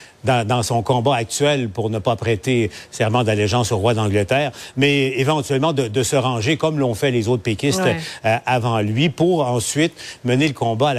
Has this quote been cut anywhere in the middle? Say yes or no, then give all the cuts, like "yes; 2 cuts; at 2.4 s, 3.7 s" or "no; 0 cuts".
no; 0 cuts